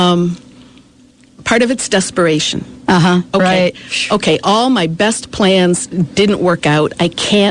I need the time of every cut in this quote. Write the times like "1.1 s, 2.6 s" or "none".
none